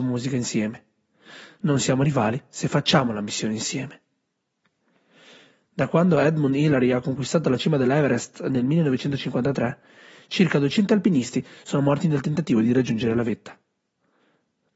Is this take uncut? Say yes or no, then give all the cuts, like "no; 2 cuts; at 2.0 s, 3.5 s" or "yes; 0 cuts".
no; 1 cut; at 1.5 s